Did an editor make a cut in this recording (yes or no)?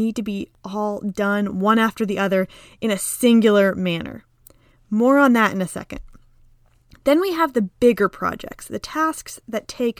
no